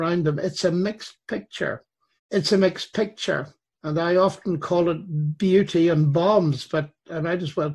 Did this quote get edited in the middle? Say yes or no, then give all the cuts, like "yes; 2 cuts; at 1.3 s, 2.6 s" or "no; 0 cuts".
yes; 1 cut; at 2.2 s